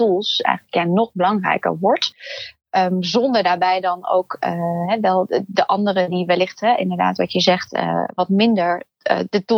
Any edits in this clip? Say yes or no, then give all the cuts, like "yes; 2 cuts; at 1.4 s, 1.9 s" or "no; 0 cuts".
no; 0 cuts